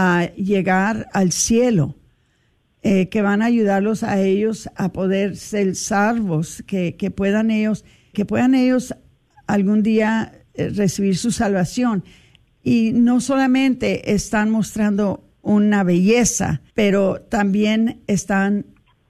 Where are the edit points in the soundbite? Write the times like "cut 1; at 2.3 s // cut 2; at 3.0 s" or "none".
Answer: cut 1; at 8.1 s // cut 2; at 12.5 s // cut 3; at 16.7 s